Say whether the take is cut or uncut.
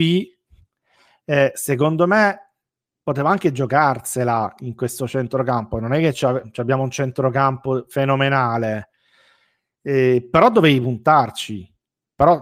uncut